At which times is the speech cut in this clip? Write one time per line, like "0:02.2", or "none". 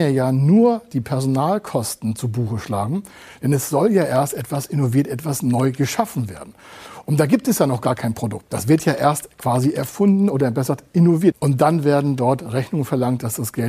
0:11.3